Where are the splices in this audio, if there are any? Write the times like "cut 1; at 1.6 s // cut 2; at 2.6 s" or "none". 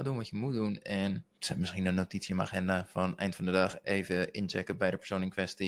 cut 1; at 1.3 s